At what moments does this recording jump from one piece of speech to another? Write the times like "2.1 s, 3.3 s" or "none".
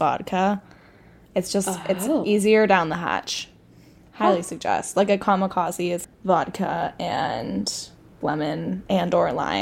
4.1 s, 6.0 s, 8.2 s

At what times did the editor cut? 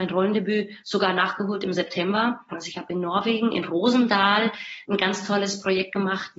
2.5 s

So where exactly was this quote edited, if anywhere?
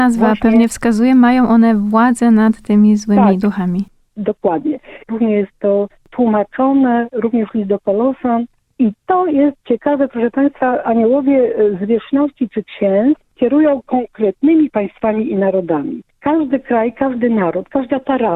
5.1 s

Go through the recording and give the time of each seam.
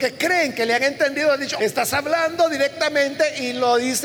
1.6 s

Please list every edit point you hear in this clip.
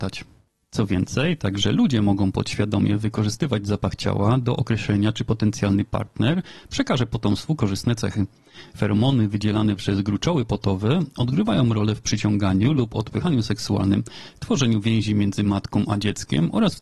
none

